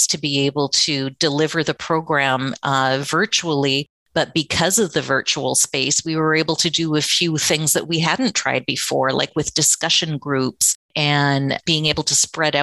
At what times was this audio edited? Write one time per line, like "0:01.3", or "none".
0:10.8